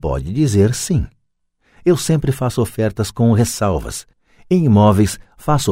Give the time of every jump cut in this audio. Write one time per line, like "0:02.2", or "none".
none